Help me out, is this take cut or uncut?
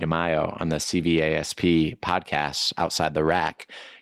uncut